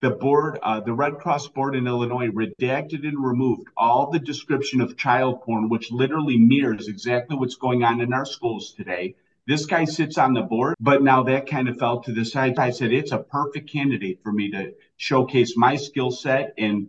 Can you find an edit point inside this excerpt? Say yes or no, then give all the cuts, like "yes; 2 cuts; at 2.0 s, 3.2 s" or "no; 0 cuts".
yes; 2 cuts; at 10.7 s, 12.6 s